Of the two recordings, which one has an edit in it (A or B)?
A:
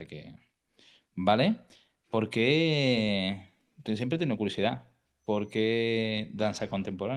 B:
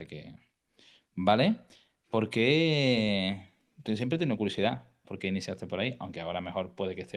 B